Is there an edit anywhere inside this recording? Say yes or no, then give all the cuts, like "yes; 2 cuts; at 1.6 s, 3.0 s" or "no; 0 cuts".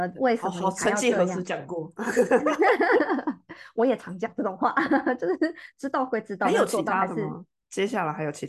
no; 0 cuts